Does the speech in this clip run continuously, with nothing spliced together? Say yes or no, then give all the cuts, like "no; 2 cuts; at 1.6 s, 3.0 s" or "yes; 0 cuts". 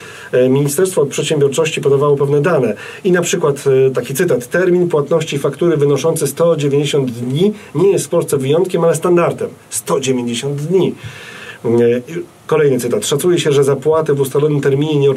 yes; 0 cuts